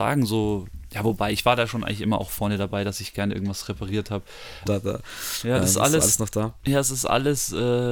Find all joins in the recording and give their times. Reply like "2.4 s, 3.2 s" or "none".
4.7 s